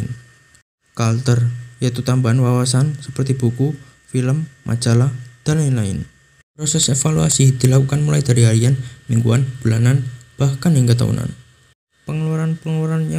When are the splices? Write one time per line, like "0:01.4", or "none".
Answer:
0:06.4